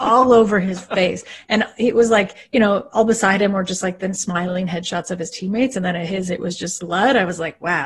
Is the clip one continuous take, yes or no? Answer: no